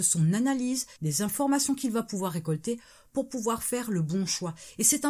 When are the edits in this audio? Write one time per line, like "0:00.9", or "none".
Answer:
0:01.0